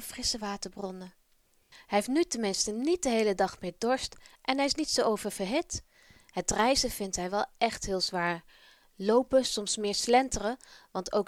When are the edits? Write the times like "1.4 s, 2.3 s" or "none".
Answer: none